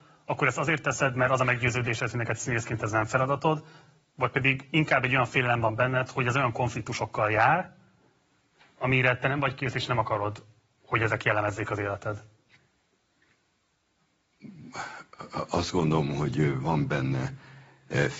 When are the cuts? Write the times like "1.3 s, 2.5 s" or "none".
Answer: none